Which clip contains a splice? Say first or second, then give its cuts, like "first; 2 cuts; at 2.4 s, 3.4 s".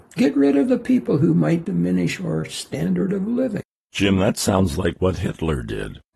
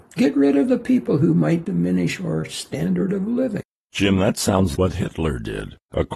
second; 1 cut; at 4.7 s